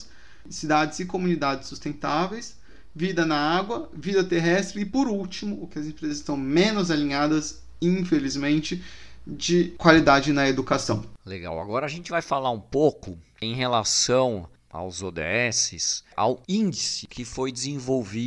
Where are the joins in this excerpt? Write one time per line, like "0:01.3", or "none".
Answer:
none